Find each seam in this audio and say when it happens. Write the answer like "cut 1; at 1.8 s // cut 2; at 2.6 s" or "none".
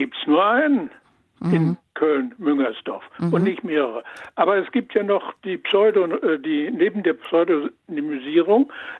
none